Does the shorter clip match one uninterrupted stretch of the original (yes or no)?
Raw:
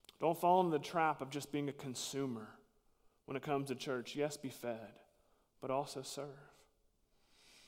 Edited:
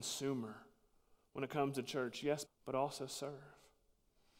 no